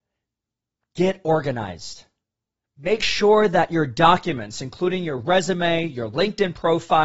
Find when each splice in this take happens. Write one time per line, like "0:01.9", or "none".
none